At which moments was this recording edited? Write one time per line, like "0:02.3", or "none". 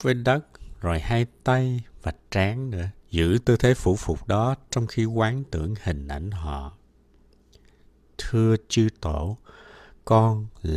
0:03.0